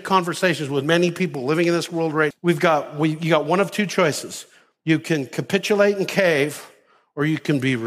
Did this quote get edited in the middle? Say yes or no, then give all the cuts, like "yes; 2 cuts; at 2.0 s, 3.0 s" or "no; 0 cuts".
yes; 1 cut; at 2.3 s